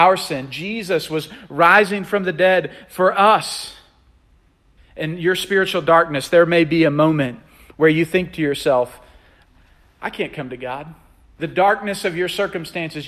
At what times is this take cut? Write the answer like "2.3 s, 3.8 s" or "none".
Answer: 4.8 s